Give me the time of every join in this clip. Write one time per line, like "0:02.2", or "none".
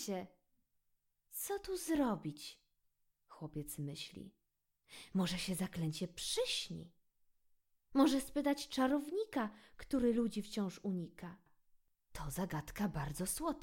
0:12.1